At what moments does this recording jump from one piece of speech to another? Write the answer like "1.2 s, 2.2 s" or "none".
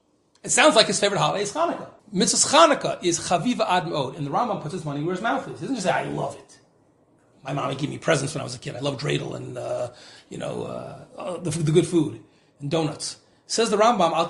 2.0 s